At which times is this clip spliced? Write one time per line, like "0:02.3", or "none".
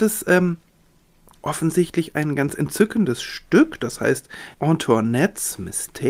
0:01.3
0:04.5